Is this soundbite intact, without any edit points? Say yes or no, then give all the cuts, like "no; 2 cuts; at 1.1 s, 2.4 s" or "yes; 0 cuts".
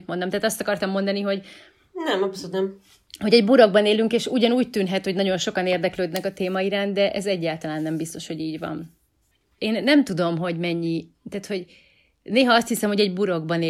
no; 1 cut; at 9.6 s